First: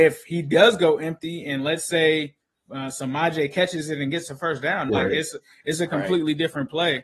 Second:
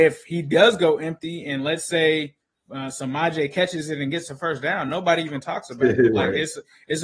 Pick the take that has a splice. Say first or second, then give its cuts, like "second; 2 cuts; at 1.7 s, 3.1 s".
first; 1 cut; at 4.9 s